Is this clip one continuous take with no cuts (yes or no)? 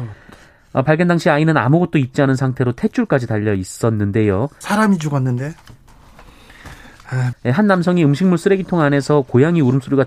no